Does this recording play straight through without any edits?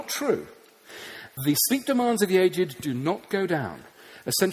yes; 0 cuts

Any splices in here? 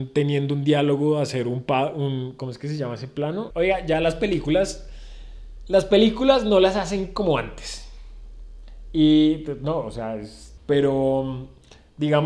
yes; 2 cuts; at 3.5 s, 10.6 s

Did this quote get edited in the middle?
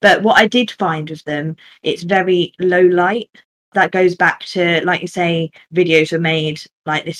no; 0 cuts

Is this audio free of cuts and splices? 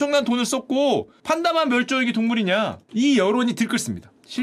no; 1 cut; at 2.8 s

